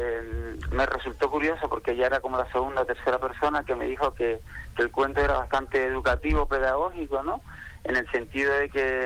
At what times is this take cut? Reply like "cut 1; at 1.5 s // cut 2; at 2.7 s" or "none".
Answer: none